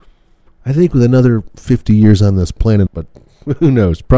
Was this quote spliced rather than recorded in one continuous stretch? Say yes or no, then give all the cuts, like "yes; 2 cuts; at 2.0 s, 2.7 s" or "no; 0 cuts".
yes; 1 cut; at 2.9 s